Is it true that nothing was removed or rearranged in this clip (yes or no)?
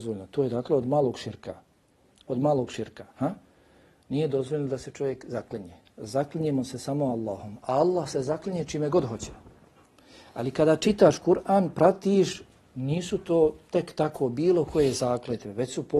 yes